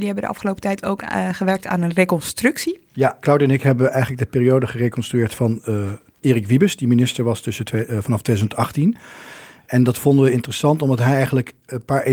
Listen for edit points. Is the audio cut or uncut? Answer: uncut